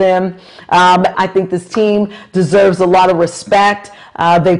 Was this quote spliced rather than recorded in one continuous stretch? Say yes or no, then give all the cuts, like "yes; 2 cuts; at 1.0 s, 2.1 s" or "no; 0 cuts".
yes; 1 cut; at 1.1 s